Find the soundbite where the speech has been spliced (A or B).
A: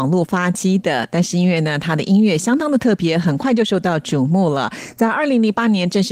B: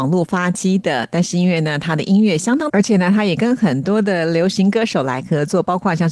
B